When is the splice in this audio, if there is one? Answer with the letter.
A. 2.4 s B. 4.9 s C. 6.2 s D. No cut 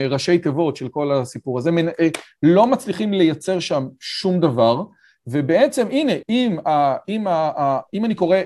C